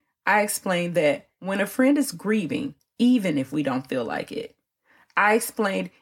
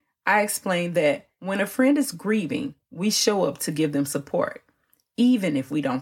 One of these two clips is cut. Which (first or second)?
first